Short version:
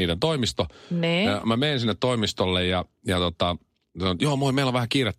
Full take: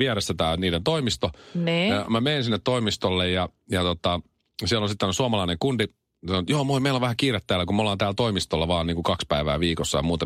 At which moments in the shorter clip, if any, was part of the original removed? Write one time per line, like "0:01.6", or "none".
0:03.8